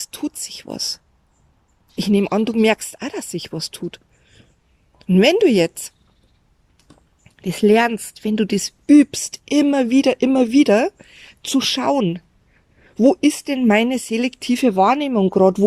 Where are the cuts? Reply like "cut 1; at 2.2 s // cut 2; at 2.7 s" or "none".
none